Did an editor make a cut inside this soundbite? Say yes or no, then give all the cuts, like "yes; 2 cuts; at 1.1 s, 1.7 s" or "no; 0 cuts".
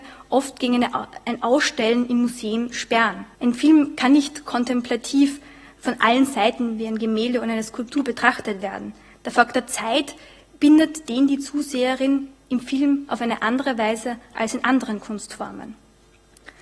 yes; 1 cut; at 3.3 s